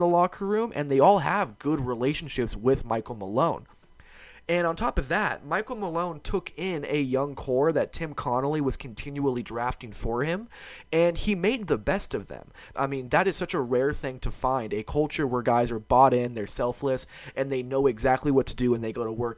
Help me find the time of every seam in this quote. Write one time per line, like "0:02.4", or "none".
0:12.7